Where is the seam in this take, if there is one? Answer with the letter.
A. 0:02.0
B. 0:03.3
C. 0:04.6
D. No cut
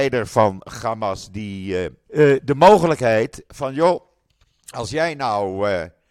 A